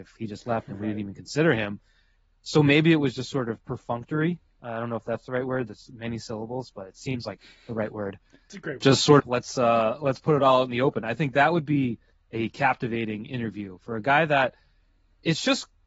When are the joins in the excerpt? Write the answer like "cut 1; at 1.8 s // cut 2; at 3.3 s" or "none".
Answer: cut 1; at 9.2 s